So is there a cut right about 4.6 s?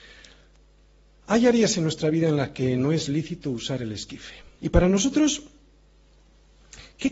yes; 1 cut; at 4.6 s

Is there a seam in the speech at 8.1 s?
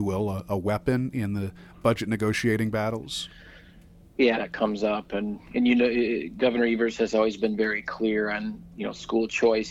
no; 1 cut; at 4.3 s

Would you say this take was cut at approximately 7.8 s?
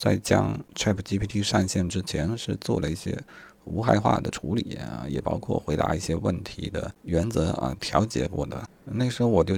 yes; 1 cut; at 7.8 s

